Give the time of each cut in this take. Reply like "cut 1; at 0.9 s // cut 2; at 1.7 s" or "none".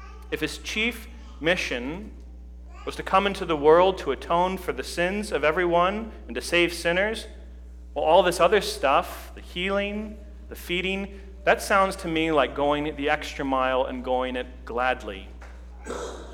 cut 1; at 10.5 s